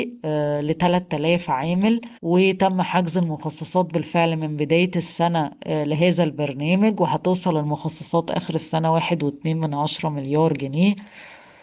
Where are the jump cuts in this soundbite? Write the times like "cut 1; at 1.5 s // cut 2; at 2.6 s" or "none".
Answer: cut 1; at 2.2 s